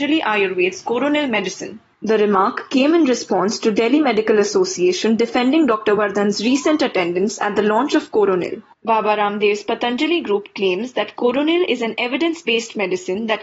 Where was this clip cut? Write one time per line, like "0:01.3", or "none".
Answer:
none

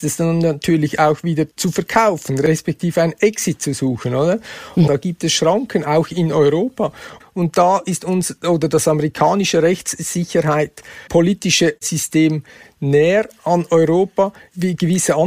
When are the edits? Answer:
0:04.9
0:07.2
0:11.1

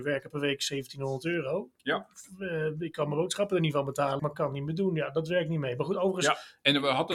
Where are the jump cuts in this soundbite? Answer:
0:04.2

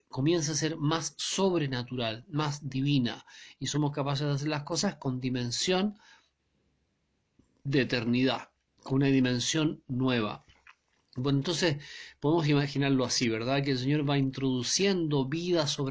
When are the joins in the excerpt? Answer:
none

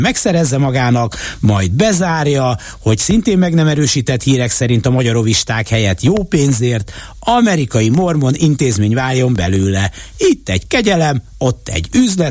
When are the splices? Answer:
none

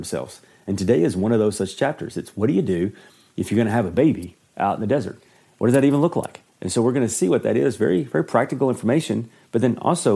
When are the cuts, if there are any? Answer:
none

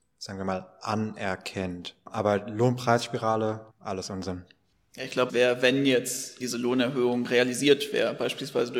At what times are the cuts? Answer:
0:03.7
0:05.3
0:06.4

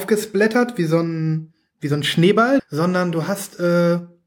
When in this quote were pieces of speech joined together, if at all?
0:02.6

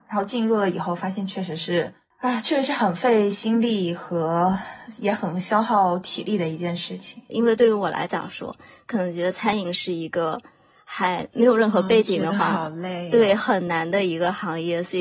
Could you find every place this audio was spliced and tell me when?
0:07.3

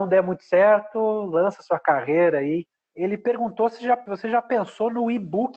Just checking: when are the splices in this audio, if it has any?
0:02.9

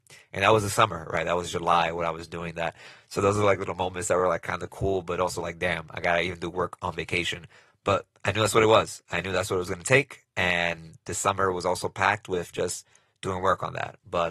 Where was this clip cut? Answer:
none

